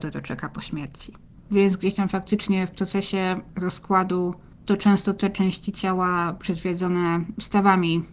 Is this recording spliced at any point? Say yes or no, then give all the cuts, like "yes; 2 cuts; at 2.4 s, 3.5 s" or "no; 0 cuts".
yes; 1 cut; at 1.4 s